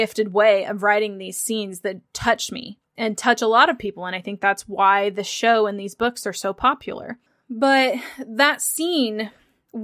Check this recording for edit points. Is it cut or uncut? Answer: uncut